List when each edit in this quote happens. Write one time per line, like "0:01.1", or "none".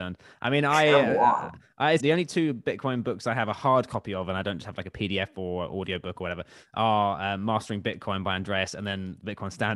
0:02.0